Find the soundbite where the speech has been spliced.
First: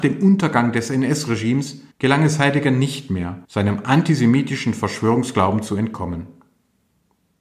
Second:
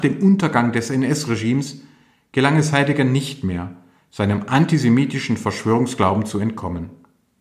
first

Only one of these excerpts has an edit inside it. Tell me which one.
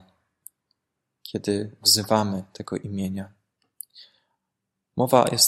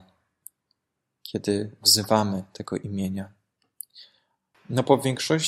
second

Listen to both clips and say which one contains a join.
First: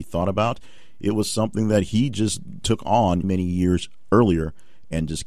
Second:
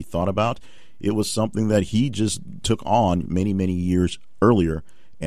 first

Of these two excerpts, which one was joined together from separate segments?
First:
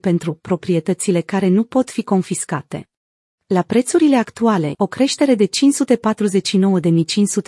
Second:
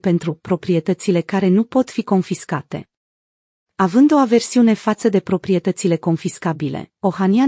first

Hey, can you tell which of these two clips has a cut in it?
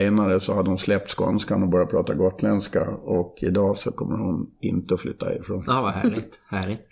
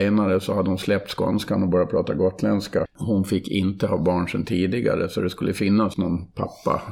second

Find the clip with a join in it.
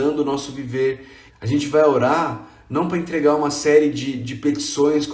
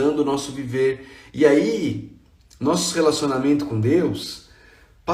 first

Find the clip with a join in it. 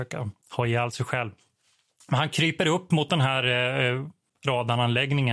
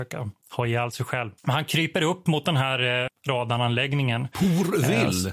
second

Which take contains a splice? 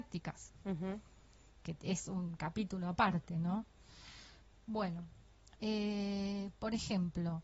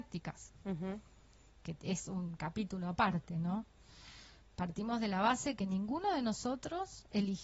first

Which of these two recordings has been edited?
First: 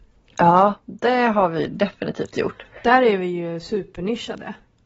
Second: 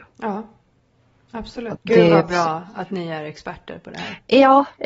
second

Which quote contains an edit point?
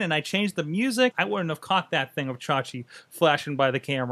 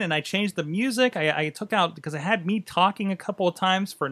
first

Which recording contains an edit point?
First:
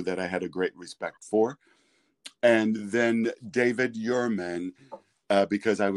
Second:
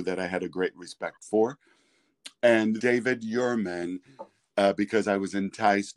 second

